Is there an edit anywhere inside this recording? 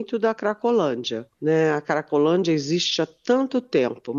yes; 1 cut; at 1.3 s

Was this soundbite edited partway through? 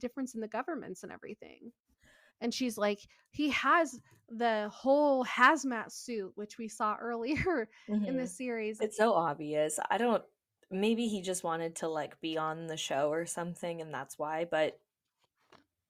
yes; 2 cuts; at 2.3 s, 8.8 s

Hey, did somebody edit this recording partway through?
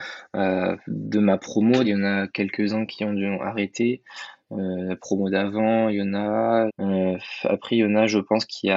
yes; 2 cuts; at 1.8 s, 6.7 s

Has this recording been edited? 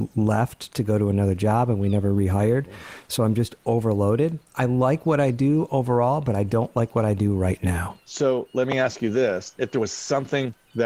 no; 0 cuts

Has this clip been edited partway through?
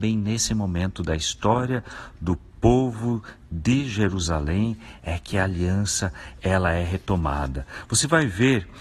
no; 0 cuts

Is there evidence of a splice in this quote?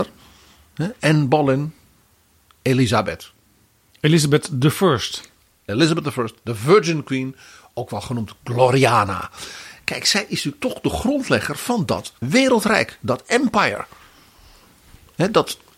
yes; 1 cut; at 12.2 s

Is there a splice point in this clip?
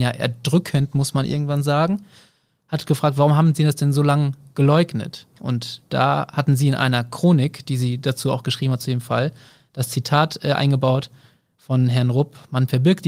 no; 0 cuts

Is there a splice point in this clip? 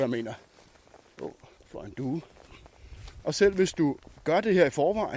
yes; 1 cut; at 1.2 s

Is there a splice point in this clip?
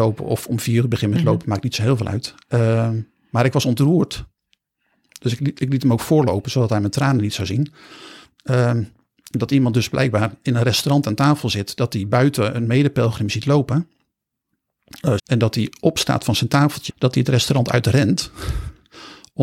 yes; 2 cuts; at 15.2 s, 16.9 s

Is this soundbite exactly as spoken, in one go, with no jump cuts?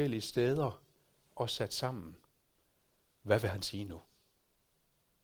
yes; 0 cuts

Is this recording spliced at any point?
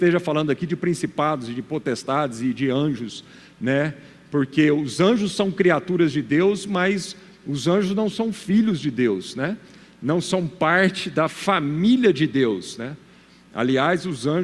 no; 0 cuts

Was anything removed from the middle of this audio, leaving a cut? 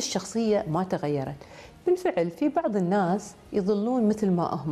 yes; 1 cut; at 1.8 s

